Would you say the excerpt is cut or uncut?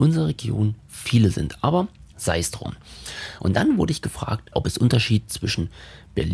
uncut